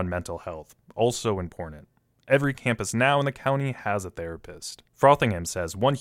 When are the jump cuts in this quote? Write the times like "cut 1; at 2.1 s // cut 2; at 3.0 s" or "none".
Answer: cut 1; at 4.9 s